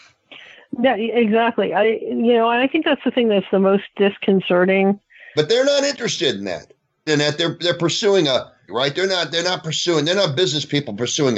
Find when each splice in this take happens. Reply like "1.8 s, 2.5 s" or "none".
5.4 s, 7.1 s, 8.7 s